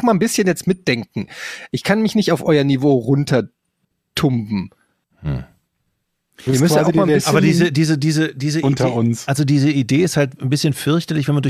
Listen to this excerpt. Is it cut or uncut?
uncut